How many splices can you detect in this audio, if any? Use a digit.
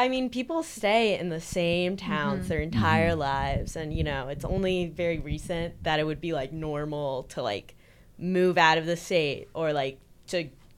0